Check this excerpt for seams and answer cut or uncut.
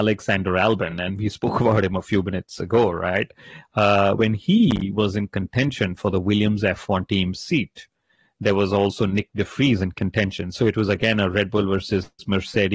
uncut